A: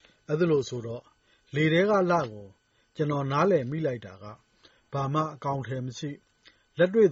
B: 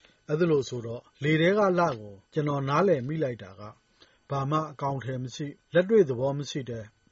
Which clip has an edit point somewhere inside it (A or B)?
B